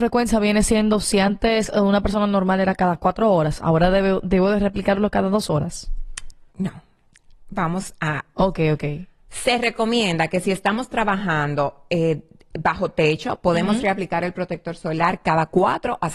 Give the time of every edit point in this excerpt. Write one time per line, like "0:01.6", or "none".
0:06.5
0:08.4